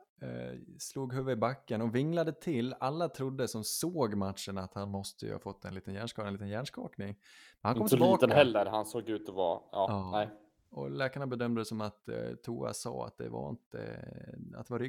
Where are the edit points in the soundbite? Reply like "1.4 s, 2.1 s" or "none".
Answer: none